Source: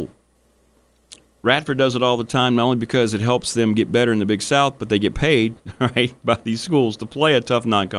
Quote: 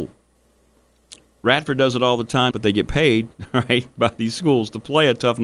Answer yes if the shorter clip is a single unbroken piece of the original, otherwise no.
no